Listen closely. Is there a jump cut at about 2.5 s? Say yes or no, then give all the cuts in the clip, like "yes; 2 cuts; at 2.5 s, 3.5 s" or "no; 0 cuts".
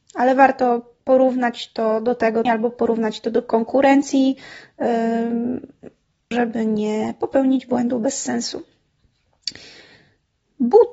yes; 2 cuts; at 2.5 s, 6.3 s